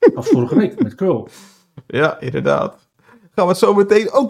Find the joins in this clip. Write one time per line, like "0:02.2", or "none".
none